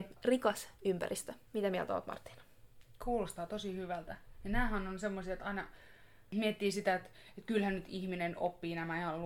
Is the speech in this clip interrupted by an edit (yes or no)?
no